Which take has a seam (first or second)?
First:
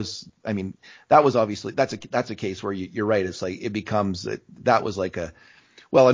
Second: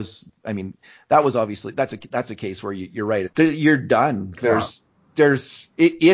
second